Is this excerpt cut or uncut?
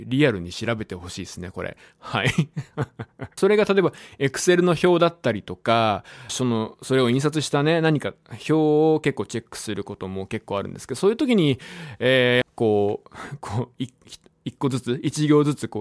cut